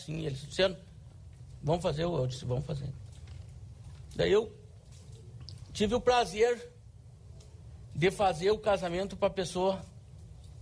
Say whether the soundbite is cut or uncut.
uncut